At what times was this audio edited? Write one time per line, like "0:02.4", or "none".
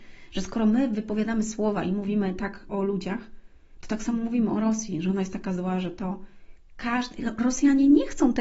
0:02.7